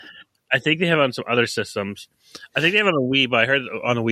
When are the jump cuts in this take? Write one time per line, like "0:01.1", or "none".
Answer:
none